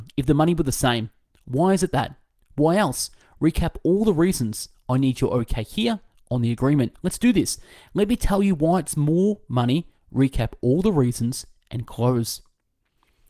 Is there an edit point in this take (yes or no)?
no